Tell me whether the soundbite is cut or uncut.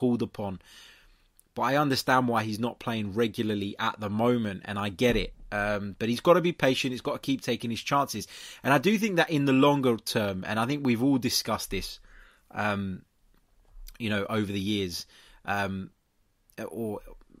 uncut